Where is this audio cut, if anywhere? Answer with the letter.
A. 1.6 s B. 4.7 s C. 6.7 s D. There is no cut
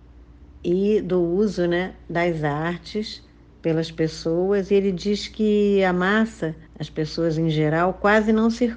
C